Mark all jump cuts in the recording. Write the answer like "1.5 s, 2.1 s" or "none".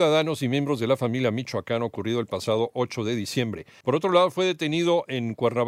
3.8 s